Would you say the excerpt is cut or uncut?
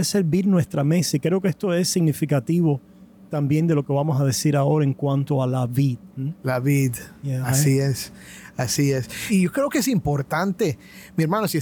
uncut